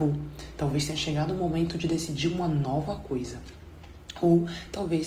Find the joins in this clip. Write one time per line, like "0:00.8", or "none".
none